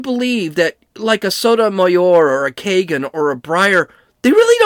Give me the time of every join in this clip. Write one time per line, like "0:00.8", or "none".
none